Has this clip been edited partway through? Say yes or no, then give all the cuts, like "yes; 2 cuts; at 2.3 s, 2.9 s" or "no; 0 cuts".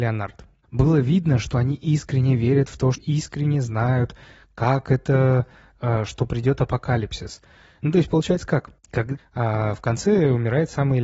yes; 3 cuts; at 2.9 s, 7.8 s, 9.2 s